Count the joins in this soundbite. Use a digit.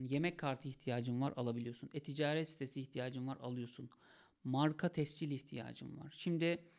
0